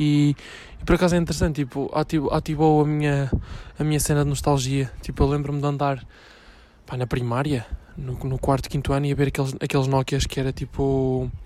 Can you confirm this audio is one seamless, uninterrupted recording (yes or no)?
yes